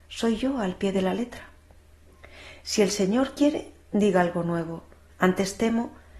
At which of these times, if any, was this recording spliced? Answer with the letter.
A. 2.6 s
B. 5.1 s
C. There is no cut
B